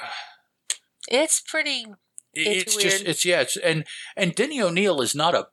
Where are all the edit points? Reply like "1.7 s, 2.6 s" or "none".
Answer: 2.7 s